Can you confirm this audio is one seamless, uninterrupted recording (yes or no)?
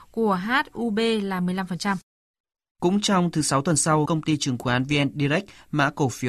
no